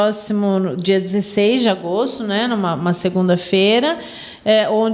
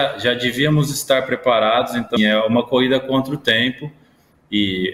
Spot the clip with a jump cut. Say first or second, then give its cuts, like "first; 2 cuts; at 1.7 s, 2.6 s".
second; 1 cut; at 2.2 s